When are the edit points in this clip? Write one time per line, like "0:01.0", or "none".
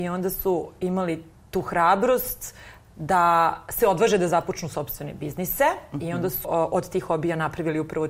0:06.4